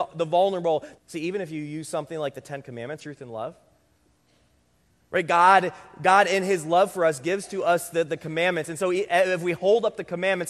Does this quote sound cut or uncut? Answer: cut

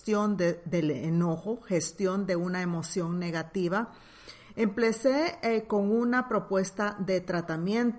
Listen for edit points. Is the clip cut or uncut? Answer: uncut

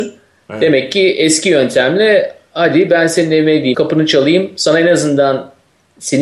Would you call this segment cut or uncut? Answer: cut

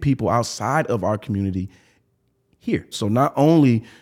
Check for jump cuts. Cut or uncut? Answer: cut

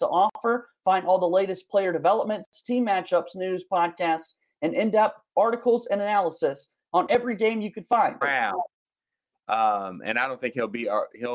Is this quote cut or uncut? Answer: cut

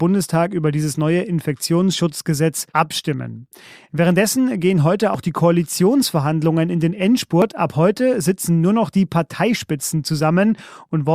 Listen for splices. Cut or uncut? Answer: cut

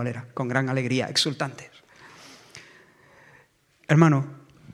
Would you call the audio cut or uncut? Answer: uncut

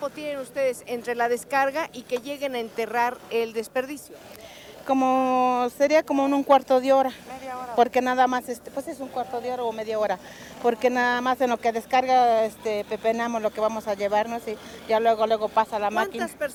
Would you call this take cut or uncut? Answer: uncut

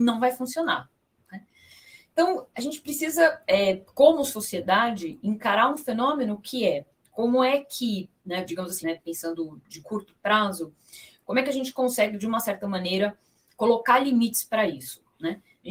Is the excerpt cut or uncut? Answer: cut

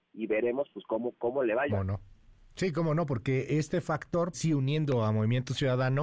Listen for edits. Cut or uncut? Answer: cut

